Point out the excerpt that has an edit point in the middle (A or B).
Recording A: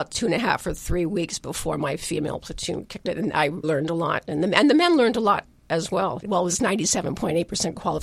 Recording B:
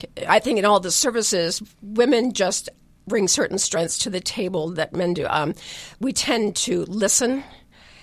A